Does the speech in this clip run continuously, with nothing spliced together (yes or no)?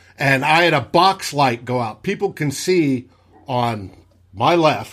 yes